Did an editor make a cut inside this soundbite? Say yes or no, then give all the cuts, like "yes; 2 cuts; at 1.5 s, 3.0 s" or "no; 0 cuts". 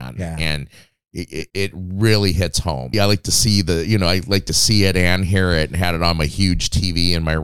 yes; 2 cuts; at 1.5 s, 2.9 s